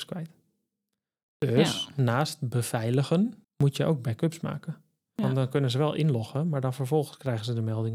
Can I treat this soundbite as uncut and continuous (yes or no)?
no